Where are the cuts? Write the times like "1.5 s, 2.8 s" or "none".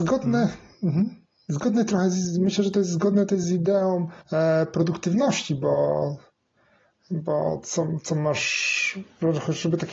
4.2 s